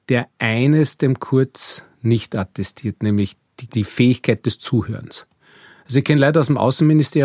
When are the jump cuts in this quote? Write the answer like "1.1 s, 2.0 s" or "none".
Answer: 3.7 s